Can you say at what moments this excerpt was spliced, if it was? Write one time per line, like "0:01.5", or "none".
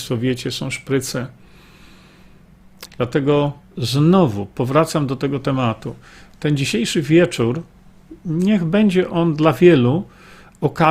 0:02.9